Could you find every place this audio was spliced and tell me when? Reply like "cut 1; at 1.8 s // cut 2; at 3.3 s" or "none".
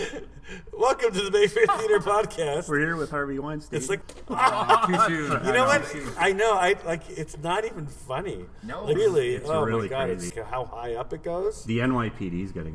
cut 1; at 9.0 s // cut 2; at 10.3 s